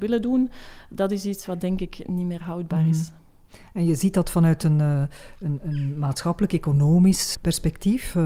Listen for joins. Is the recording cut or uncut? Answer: cut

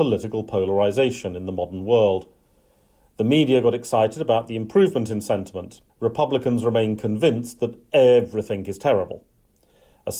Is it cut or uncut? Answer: cut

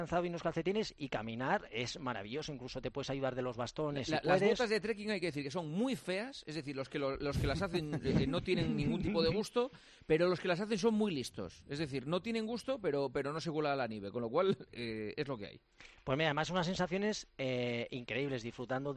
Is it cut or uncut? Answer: cut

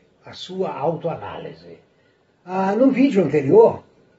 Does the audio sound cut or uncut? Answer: uncut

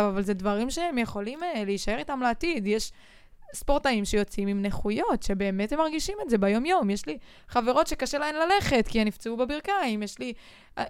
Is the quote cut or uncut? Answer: uncut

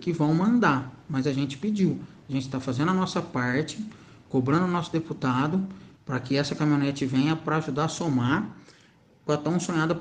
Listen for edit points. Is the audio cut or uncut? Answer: cut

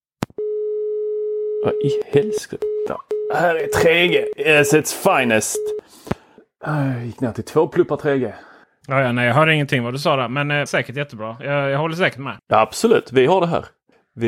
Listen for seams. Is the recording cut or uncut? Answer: cut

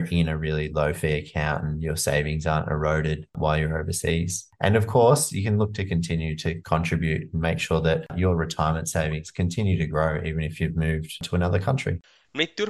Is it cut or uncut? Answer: uncut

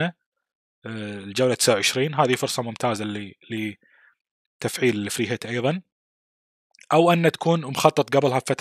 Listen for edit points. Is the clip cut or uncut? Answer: uncut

